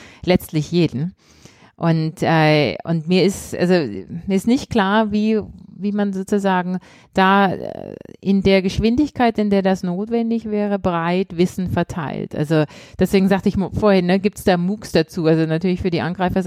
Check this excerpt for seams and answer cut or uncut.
uncut